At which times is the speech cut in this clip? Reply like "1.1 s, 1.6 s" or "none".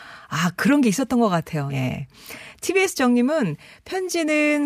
1.7 s